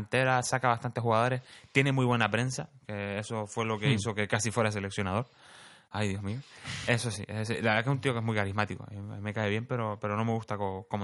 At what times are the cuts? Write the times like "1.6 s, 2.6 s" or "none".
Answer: 6.9 s